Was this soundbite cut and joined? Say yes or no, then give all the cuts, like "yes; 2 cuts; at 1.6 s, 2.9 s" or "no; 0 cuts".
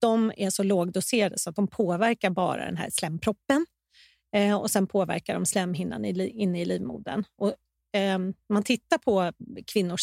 no; 0 cuts